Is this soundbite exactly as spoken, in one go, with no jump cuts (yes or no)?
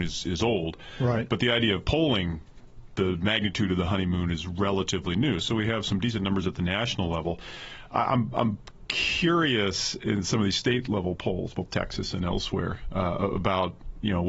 yes